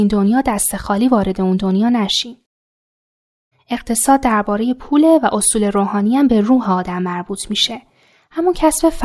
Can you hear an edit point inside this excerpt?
yes; 1 cut; at 3.5 s

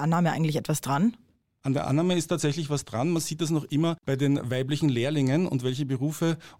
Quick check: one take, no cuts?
yes; 0 cuts

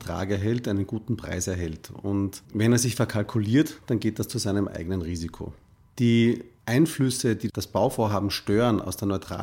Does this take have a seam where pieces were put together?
no; 0 cuts

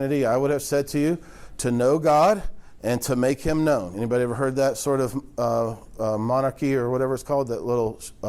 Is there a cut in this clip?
no; 0 cuts

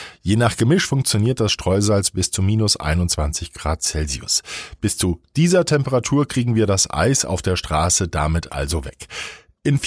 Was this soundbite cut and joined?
no; 0 cuts

